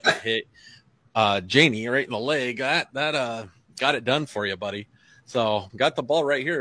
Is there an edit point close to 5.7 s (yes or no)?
yes